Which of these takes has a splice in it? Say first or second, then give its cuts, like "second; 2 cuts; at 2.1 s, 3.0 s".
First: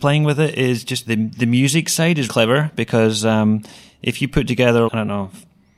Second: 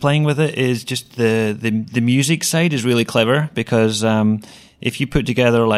first; 3 cuts; at 1.1 s, 2.3 s, 4.9 s